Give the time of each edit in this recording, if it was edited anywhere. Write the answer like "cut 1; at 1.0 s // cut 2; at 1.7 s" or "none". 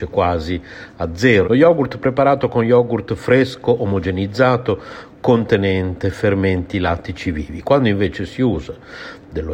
cut 1; at 1.4 s